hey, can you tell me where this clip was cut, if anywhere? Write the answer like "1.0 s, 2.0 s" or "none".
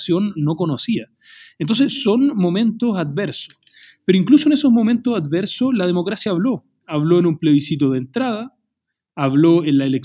none

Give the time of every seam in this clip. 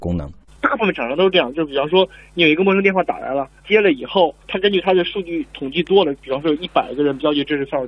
4.4 s

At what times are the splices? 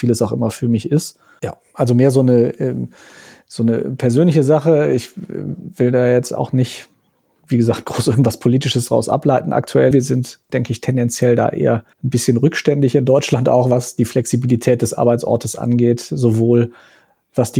1.4 s, 9.9 s, 11.9 s

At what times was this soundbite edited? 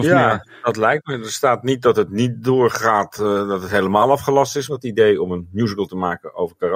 4.7 s

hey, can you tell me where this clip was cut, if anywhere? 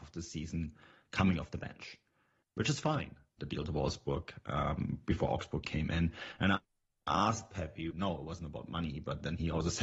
3.4 s, 7.9 s

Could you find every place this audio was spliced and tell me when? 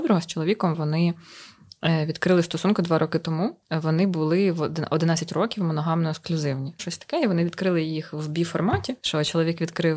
3.6 s, 6.8 s, 9.0 s

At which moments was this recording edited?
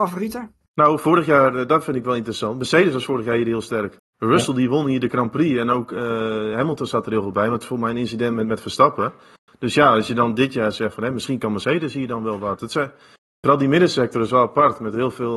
none

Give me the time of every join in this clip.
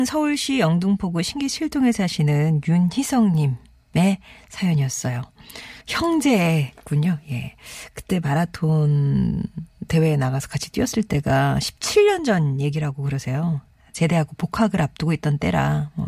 5.8 s

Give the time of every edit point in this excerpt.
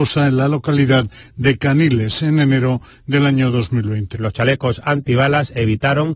4.1 s

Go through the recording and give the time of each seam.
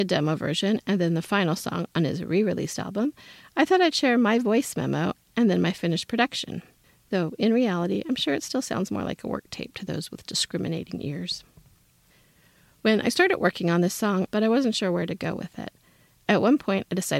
14.3 s

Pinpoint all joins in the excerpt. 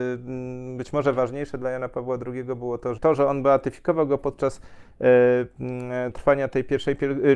3.0 s

